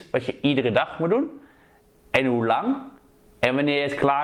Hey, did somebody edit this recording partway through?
no; 0 cuts

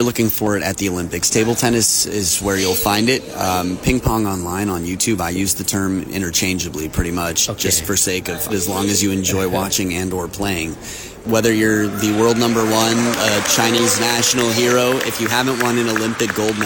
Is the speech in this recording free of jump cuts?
no; 2 cuts; at 8.5 s, 11.2 s

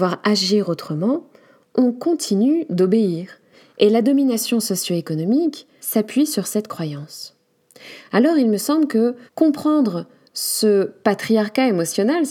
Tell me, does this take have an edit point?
yes; 2 cuts; at 5.8 s, 9.3 s

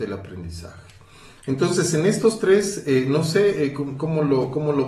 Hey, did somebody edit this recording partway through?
no; 0 cuts

